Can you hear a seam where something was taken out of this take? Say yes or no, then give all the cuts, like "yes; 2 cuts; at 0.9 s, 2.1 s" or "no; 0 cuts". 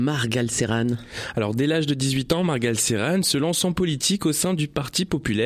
no; 0 cuts